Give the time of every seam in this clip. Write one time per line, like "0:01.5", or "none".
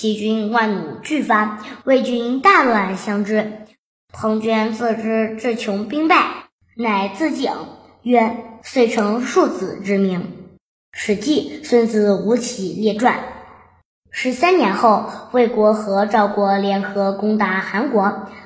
none